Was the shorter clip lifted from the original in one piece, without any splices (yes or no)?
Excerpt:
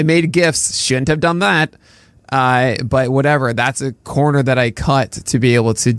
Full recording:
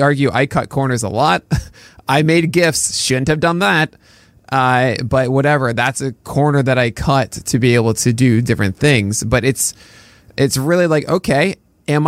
yes